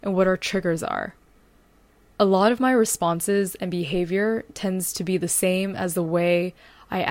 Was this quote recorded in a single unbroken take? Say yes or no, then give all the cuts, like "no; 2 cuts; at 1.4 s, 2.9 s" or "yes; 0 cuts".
no; 1 cut; at 2.0 s